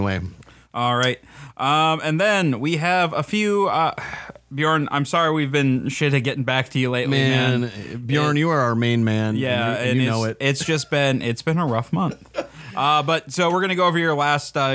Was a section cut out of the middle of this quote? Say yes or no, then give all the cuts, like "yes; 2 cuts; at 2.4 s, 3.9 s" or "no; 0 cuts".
no; 0 cuts